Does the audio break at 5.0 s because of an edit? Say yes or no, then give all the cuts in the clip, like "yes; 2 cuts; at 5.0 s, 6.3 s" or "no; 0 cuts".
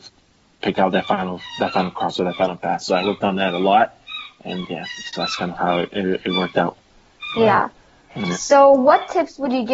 no; 0 cuts